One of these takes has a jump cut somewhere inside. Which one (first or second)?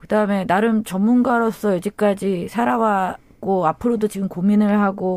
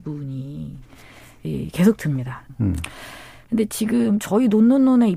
second